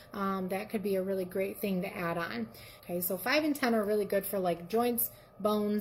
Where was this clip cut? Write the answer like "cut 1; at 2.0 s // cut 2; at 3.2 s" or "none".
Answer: cut 1; at 2.8 s